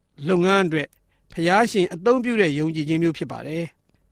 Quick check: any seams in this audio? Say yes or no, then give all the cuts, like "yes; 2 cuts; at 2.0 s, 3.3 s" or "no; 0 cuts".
no; 0 cuts